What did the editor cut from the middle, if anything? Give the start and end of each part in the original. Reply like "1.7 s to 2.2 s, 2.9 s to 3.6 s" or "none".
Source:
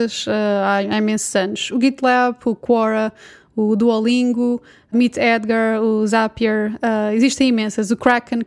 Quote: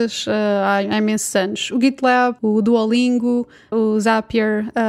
2.4 s to 3.5 s, 4.9 s to 5.8 s